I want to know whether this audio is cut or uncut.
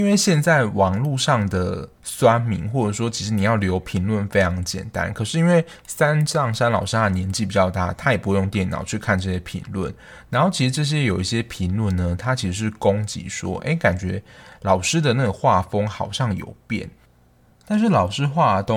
uncut